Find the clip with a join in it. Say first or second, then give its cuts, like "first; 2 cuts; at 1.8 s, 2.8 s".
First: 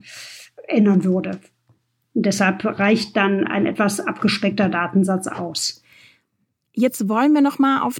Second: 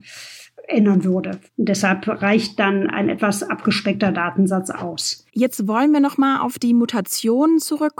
second; 2 cuts; at 1.5 s, 5.3 s